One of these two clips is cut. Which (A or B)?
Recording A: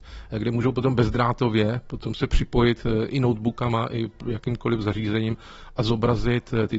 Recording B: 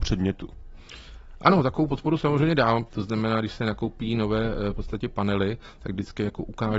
B